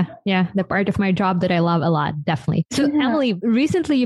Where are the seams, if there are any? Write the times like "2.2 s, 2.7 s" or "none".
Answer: none